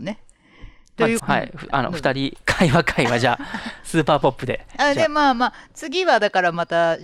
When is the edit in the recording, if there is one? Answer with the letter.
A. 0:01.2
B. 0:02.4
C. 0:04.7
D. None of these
A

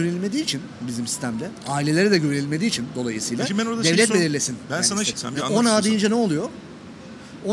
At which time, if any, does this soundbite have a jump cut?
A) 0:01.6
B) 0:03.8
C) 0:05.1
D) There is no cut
C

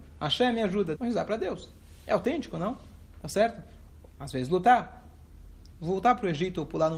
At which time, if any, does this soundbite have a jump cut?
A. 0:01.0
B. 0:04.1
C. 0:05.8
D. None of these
A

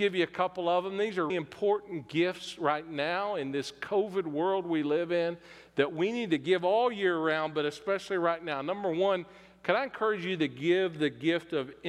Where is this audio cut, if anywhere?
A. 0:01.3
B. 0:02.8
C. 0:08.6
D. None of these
A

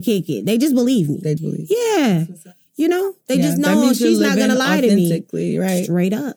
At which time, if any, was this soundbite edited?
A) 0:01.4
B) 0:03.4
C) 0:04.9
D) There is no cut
A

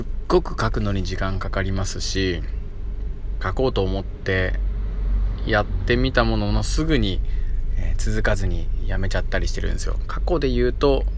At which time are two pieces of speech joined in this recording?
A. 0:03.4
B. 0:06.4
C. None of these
A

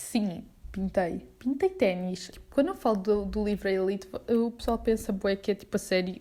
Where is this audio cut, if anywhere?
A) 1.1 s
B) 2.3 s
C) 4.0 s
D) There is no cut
B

